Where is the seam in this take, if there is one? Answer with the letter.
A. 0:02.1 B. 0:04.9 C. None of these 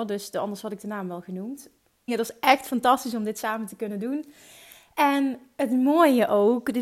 A